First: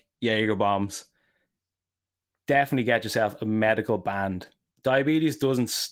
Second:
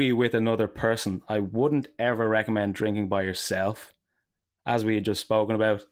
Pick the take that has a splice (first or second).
first